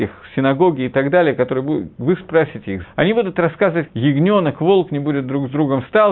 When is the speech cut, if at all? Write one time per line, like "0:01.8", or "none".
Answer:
0:02.8
0:03.9